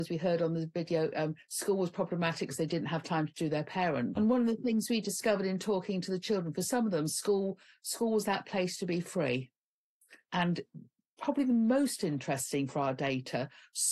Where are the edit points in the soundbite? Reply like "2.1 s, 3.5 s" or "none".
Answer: 4.1 s, 10.3 s